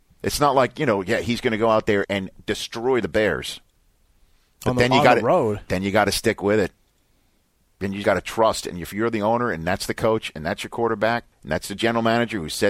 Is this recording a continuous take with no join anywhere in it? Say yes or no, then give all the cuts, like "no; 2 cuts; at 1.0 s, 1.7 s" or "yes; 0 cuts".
no; 3 cuts; at 2.0 s, 8.0 s, 11.3 s